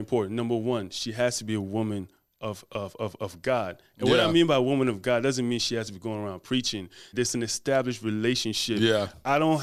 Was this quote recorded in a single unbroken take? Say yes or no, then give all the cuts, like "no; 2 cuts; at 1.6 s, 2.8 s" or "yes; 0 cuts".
no; 1 cut; at 7.1 s